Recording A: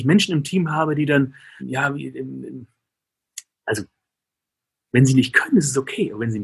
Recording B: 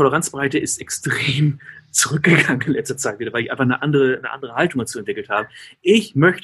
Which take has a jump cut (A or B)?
A